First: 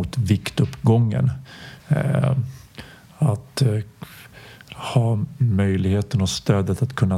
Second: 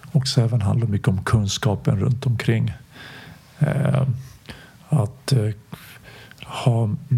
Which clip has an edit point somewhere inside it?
first; 1 cut; at 1.8 s

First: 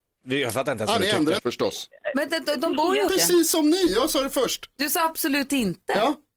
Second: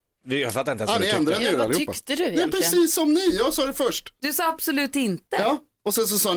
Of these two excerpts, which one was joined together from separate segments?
first; 2 cuts; at 1.4 s, 3.1 s

